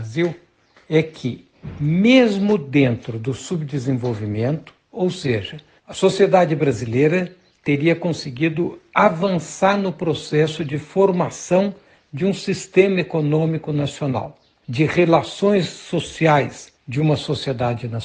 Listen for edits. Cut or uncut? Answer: cut